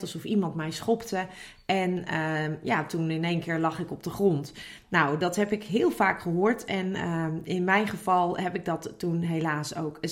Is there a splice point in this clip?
no; 0 cuts

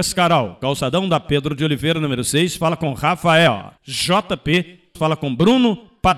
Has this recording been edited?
yes; 2 cuts; at 3.8 s, 4.9 s

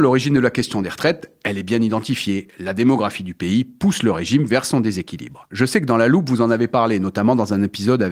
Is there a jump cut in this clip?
yes; 1 cut; at 5.5 s

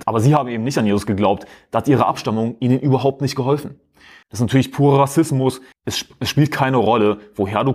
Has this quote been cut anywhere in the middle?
yes; 2 cuts; at 4.2 s, 5.7 s

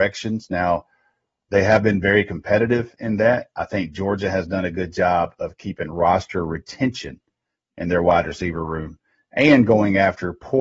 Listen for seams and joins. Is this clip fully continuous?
yes; 0 cuts

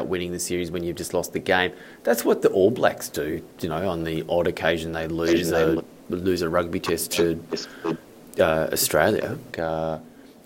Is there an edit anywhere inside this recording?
yes; 2 cuts; at 5.8 s, 9.5 s

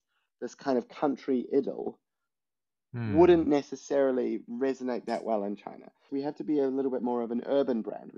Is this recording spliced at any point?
yes; 1 cut; at 6.1 s

